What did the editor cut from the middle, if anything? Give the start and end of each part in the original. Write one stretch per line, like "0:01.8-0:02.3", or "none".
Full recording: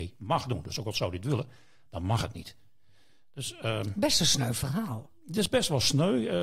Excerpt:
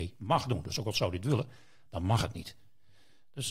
none